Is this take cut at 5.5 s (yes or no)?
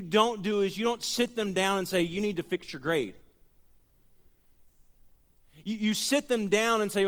no